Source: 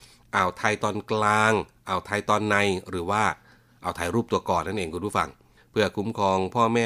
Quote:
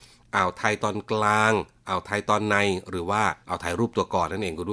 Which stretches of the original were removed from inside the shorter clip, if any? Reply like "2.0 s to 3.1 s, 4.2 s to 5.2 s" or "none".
3.4 s to 3.8 s